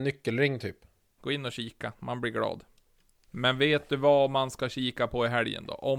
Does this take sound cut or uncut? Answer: cut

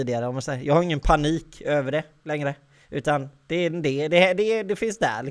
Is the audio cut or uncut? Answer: uncut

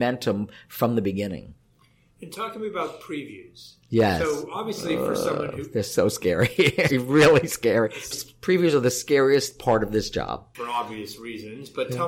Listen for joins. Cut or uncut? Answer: cut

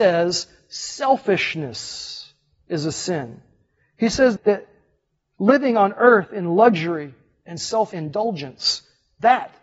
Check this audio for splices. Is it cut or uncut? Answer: cut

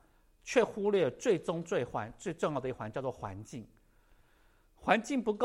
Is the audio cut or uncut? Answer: uncut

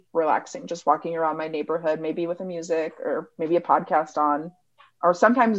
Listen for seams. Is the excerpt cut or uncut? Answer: uncut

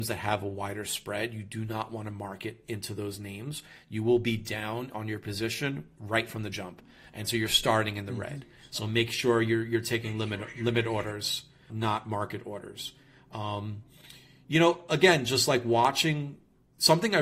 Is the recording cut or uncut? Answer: cut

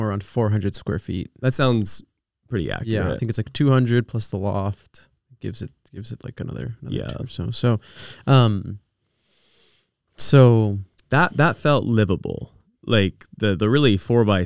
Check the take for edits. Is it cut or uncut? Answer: uncut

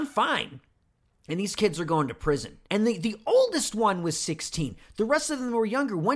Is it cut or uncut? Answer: cut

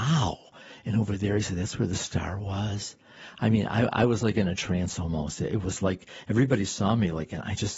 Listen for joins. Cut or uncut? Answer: uncut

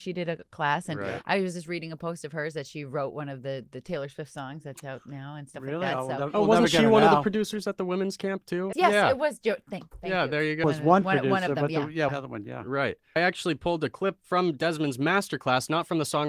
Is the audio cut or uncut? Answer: cut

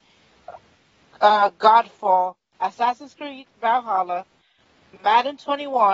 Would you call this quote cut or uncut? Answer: uncut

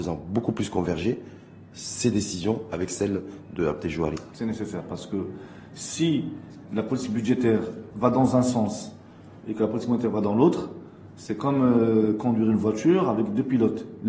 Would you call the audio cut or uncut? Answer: cut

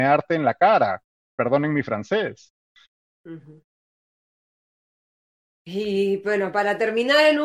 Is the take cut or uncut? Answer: uncut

